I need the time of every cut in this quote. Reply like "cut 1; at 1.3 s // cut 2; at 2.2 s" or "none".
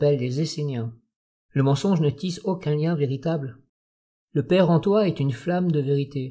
cut 1; at 1.4 s // cut 2; at 4.2 s